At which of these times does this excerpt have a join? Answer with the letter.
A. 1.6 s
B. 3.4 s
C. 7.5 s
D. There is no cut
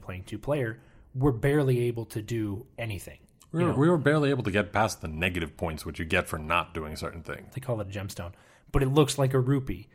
C